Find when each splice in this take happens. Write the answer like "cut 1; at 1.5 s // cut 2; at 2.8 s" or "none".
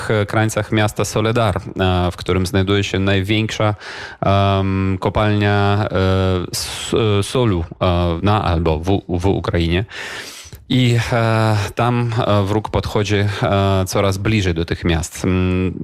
cut 1; at 8.2 s